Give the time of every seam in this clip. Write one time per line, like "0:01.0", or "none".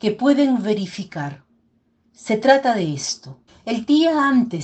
0:03.5